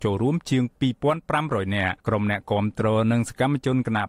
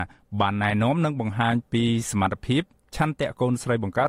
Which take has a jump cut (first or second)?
first